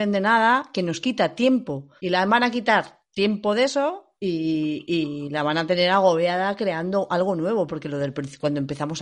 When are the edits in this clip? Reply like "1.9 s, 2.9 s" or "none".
2.0 s, 4.2 s